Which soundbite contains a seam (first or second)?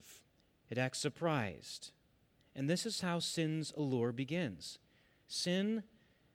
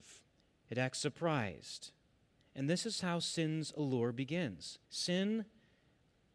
second